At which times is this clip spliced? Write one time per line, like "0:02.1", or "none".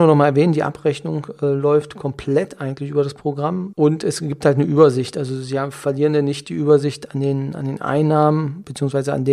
0:03.7